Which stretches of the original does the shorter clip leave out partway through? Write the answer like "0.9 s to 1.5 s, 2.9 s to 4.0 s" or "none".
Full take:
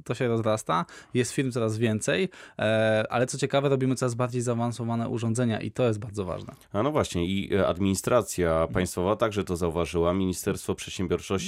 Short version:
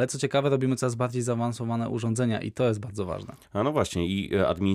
none